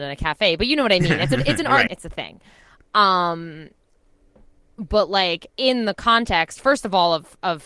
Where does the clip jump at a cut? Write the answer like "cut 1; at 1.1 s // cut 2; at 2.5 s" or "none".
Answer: cut 1; at 1.9 s // cut 2; at 5.5 s